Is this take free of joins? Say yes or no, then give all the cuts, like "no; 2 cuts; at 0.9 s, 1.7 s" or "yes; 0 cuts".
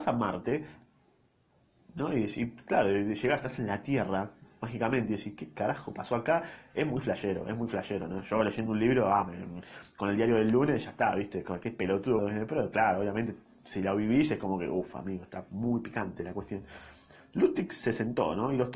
no; 1 cut; at 12.2 s